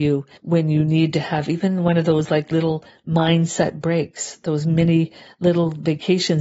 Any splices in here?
no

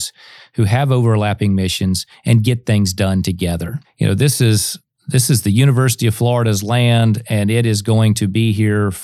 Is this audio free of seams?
yes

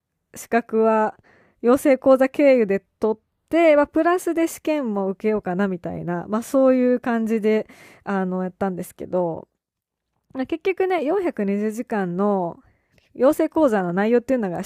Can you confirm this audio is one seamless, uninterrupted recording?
yes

